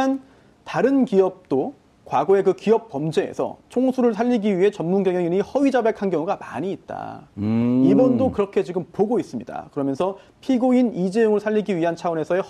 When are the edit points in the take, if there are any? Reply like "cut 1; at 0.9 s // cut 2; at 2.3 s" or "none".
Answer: none